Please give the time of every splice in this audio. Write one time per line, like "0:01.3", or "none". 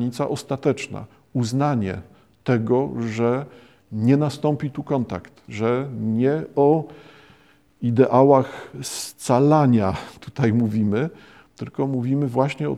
0:05.5

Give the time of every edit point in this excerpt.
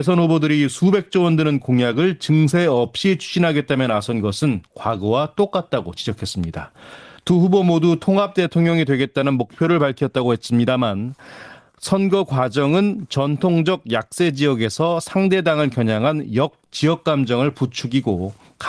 0:07.2

